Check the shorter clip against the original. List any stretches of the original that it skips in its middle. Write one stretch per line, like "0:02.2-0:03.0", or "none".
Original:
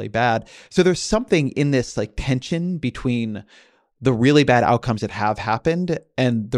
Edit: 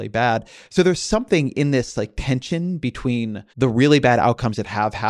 0:03.5-0:03.9